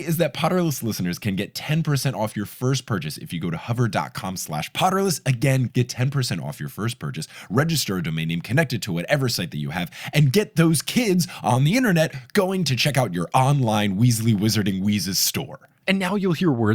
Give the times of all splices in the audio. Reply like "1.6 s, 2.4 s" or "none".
5.7 s